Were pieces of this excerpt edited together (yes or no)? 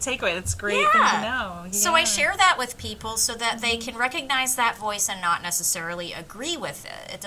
no